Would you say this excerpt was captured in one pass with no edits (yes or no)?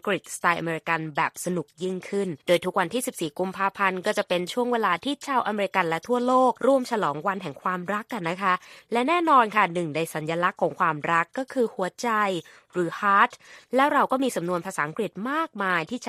no